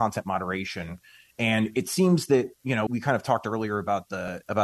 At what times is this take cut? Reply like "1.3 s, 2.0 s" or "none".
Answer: 2.9 s